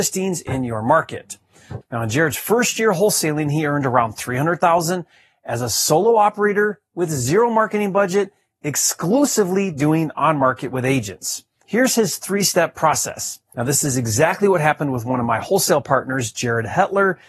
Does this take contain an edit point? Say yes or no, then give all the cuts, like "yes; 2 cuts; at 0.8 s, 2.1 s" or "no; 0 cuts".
yes; 2 cuts; at 1.8 s, 13.5 s